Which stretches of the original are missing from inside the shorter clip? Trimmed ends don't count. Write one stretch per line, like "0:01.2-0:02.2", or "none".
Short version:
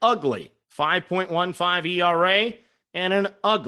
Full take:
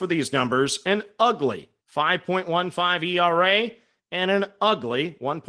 none